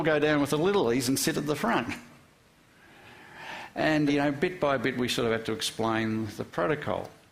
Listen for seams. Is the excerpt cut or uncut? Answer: cut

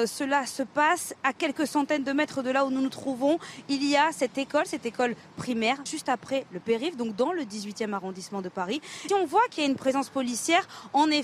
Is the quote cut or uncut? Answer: cut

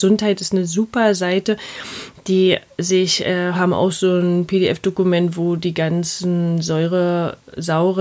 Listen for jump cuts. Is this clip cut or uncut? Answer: cut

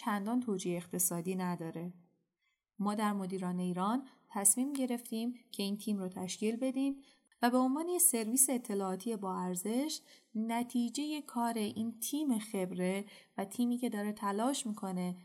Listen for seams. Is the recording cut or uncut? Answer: uncut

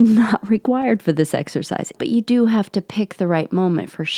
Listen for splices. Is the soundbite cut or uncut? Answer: cut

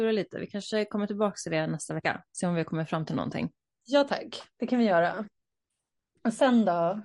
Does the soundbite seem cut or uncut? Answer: uncut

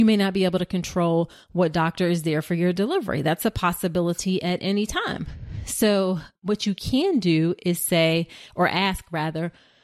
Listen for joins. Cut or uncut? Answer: uncut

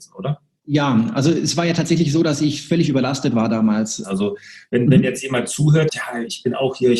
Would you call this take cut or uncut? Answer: cut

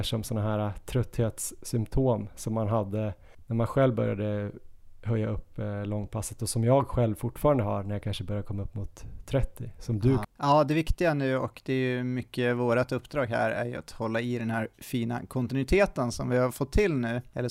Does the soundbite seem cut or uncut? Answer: cut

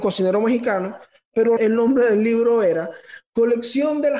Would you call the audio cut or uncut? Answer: cut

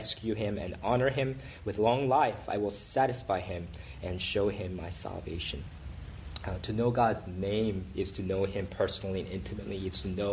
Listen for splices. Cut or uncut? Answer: uncut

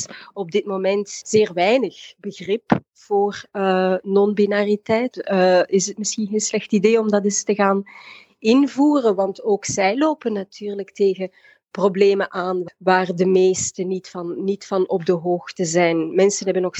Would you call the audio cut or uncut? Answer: cut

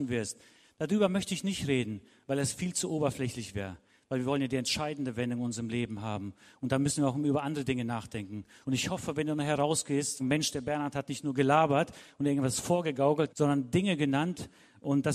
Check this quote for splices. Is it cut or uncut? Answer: cut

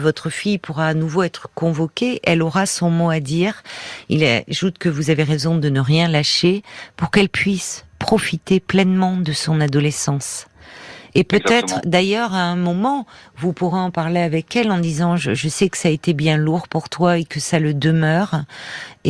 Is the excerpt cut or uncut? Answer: uncut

